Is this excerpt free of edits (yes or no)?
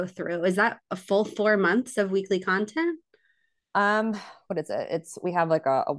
yes